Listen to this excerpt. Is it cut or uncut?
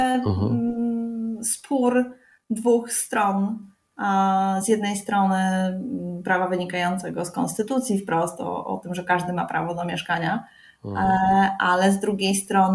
uncut